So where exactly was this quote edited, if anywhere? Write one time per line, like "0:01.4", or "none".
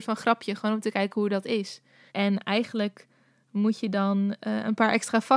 0:02.1